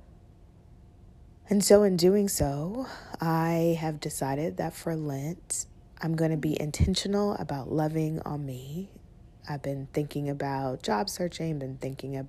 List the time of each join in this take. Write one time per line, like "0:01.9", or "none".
none